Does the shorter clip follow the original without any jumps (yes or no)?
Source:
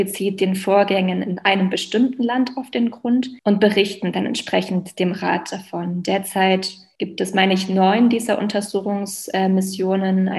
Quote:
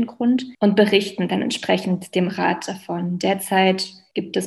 yes